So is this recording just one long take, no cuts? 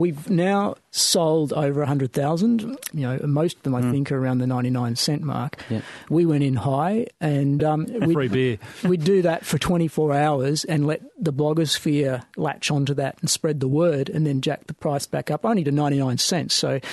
no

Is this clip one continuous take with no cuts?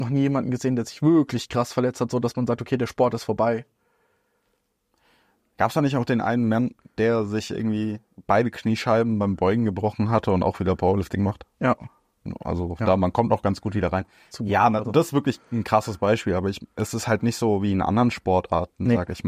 no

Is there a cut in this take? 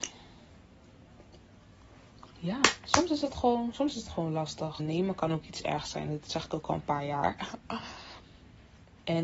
yes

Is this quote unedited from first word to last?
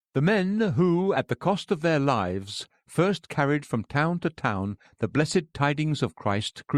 yes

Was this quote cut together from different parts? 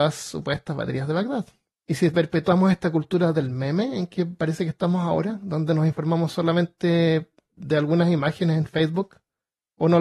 yes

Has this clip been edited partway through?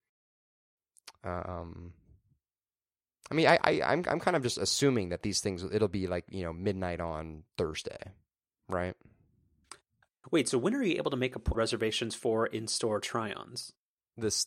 yes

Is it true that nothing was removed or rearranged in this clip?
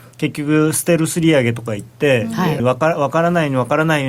no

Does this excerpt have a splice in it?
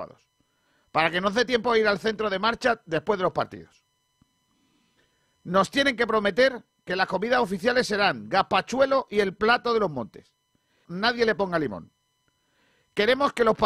yes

